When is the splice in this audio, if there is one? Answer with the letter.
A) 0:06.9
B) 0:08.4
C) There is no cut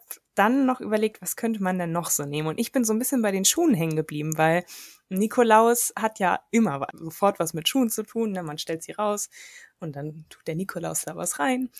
A